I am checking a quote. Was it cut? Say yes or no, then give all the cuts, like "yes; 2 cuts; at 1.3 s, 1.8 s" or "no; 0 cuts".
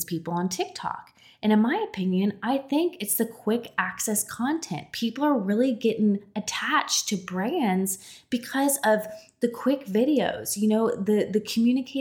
no; 0 cuts